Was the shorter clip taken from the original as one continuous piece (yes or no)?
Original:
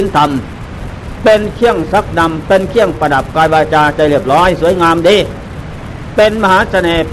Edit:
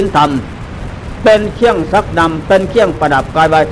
yes